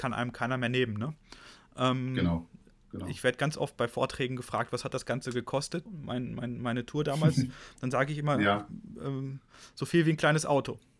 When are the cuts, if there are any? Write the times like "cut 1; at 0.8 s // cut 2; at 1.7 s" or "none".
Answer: cut 1; at 5.9 s